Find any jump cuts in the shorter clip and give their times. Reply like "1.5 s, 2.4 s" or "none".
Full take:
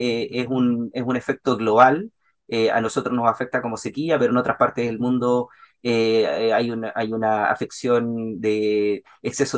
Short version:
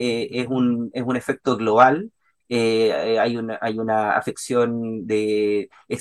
2.4 s